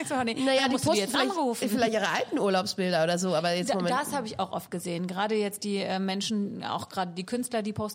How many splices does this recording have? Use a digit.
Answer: 0